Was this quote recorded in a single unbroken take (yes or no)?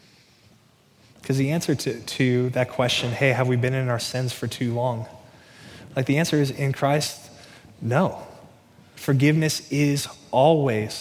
yes